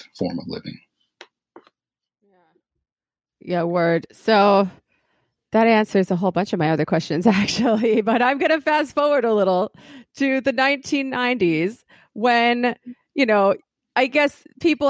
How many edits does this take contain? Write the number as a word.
zero